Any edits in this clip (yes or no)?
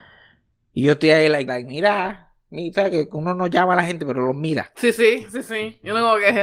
yes